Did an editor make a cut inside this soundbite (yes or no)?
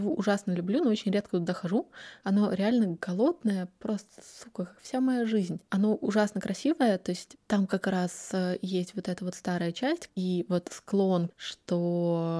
yes